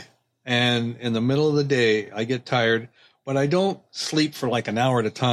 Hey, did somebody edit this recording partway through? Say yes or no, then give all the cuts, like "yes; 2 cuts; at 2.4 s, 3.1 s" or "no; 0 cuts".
no; 0 cuts